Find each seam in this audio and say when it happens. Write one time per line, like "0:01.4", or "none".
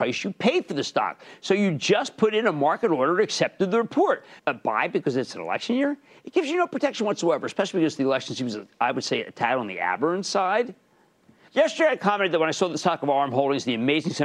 0:04.4
0:11.5